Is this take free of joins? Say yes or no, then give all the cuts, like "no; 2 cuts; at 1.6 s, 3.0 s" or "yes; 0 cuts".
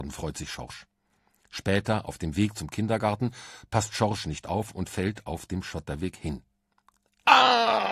yes; 0 cuts